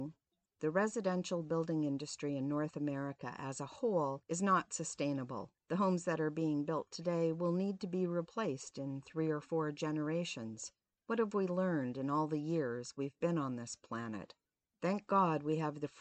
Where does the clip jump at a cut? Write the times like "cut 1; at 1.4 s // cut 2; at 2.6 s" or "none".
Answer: none